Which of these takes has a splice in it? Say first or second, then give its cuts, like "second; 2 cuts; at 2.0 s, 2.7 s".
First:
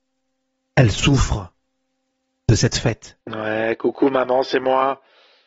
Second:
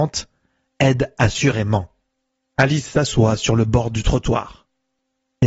first; 1 cut; at 3.2 s